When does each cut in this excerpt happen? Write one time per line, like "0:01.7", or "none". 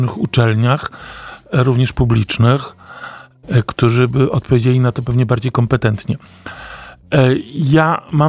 0:03.4